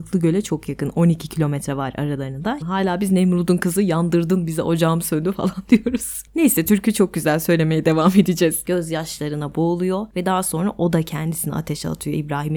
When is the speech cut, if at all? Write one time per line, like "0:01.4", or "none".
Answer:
0:02.6
0:08.6